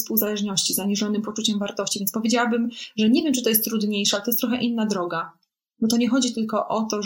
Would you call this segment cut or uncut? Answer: uncut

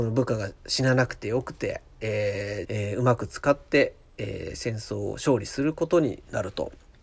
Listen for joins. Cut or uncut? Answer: cut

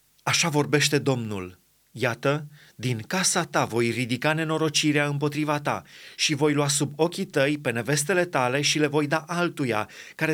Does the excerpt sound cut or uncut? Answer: uncut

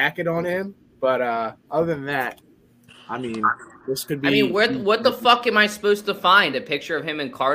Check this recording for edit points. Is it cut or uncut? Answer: uncut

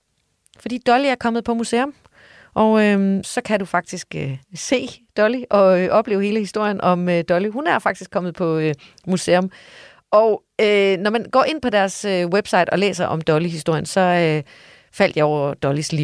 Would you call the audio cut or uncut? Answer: cut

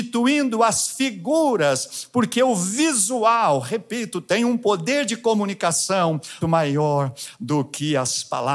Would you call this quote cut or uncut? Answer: cut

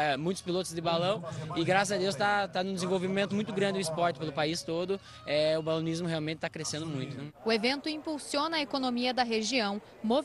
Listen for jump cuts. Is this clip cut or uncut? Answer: uncut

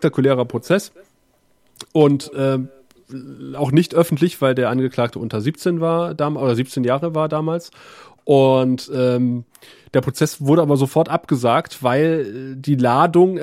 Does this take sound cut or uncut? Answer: uncut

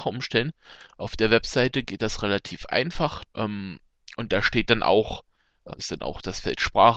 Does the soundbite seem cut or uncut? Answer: cut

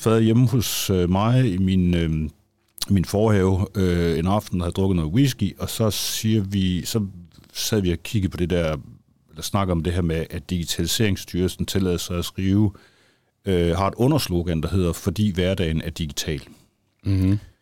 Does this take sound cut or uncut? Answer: uncut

